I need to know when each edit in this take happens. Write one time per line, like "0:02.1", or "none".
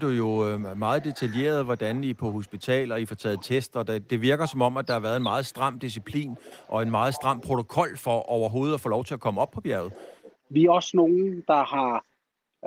0:10.3

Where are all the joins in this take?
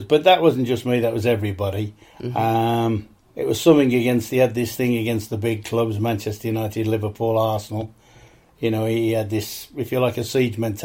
none

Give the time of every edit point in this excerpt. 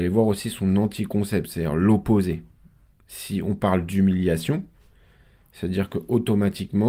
none

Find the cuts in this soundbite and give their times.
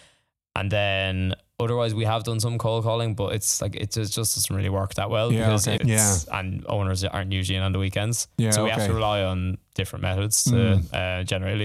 0:05.8

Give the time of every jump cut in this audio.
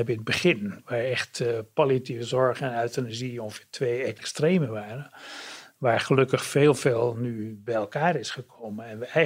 none

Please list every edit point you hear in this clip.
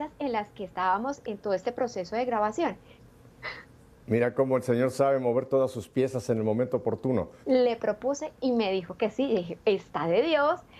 0:03.0
0:07.4

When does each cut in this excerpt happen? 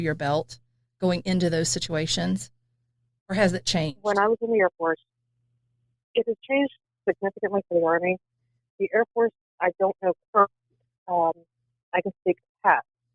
none

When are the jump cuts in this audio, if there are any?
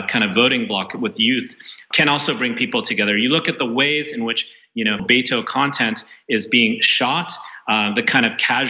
0:01.9
0:05.0

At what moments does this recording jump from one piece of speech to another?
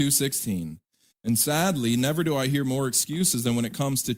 0:01.1

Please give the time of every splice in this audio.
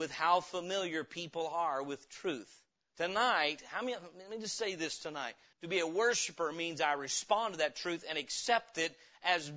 0:02.9
0:05.5

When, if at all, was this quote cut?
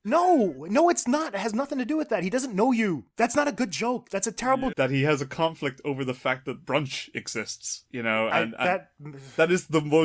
0:04.7

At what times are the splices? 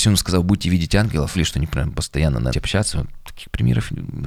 0:01.3
0:02.5

